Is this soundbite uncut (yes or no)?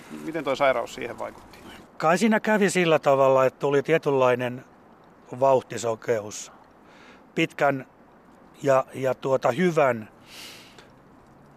yes